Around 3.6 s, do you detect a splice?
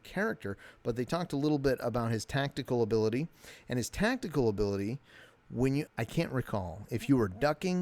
no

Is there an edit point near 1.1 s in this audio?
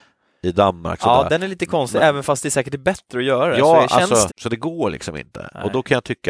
no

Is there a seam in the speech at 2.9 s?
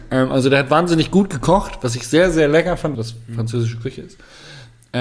yes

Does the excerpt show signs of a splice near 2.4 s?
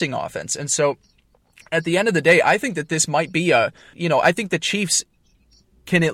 no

